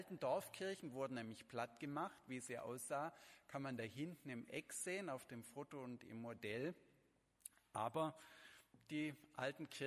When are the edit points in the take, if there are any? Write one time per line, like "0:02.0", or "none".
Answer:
none